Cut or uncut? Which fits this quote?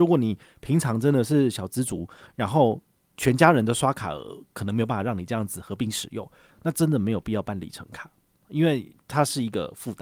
cut